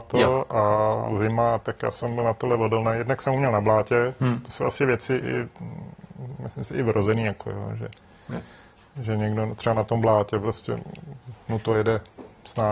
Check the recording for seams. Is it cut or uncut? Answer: cut